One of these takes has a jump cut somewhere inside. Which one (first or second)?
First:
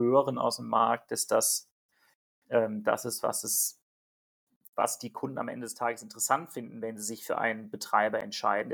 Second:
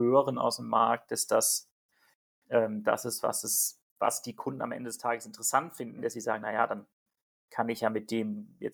second